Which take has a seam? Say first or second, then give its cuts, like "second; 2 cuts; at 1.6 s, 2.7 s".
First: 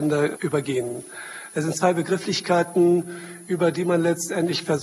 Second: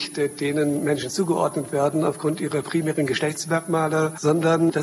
first; 1 cut; at 1.5 s